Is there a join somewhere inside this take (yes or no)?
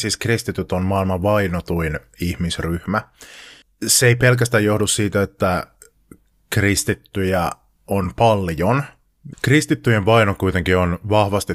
yes